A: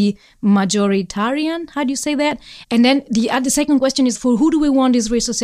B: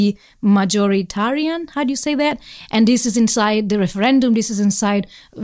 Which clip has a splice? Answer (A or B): A